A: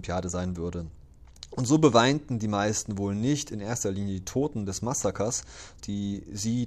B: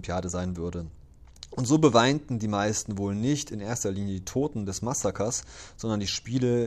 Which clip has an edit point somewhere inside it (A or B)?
A